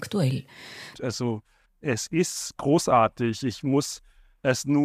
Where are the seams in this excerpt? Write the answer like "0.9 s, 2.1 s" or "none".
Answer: 0.9 s